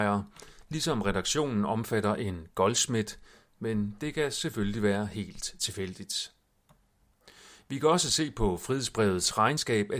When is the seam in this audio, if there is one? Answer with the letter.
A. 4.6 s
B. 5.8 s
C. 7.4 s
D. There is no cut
D